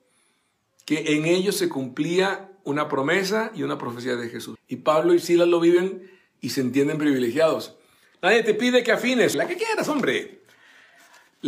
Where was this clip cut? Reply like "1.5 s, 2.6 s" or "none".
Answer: 4.6 s, 8.1 s, 9.3 s